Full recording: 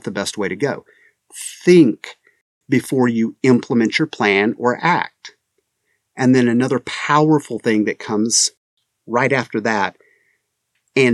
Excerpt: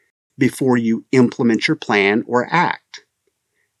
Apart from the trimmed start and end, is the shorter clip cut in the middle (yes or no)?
no